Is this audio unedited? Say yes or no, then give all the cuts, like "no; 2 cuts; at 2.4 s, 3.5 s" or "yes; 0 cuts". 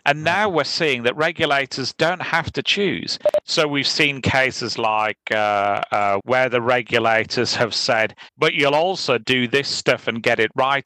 no; 3 cuts; at 3.4 s, 6.2 s, 8.3 s